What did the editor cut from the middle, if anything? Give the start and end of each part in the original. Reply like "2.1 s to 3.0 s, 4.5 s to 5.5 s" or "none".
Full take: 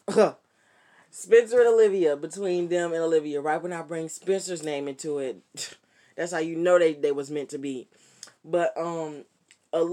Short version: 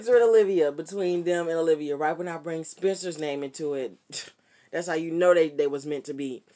none